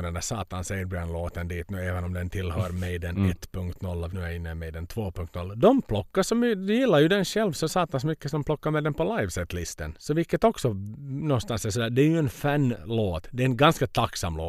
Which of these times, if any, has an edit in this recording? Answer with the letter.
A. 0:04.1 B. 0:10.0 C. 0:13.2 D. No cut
A